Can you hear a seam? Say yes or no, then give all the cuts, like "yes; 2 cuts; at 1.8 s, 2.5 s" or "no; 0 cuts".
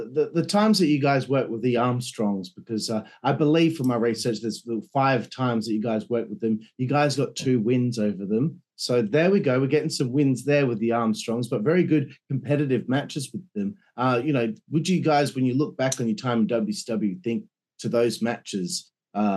no; 0 cuts